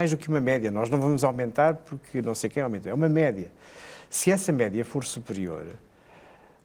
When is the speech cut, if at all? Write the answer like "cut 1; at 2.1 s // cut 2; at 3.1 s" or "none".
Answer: none